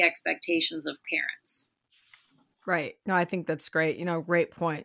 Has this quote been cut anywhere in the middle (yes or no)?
yes